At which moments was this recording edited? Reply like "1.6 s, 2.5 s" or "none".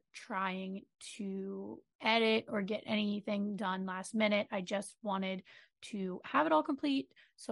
1.9 s